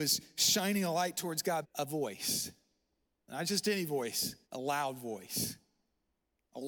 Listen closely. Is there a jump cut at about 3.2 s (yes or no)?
no